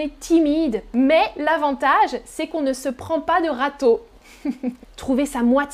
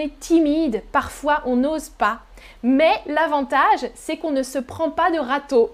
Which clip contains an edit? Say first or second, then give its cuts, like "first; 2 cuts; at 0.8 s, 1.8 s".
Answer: first; 2 cuts; at 0.9 s, 4.8 s